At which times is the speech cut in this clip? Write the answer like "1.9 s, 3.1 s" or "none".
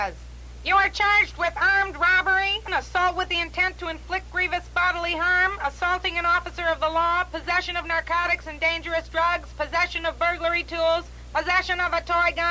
2.7 s